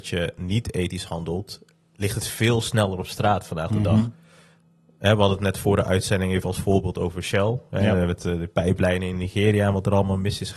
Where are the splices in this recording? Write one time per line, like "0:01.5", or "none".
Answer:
none